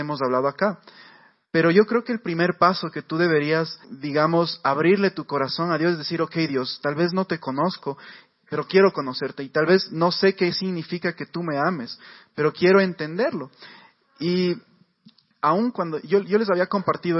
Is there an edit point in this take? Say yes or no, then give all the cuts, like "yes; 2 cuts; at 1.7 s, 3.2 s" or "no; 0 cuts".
yes; 1 cut; at 3.8 s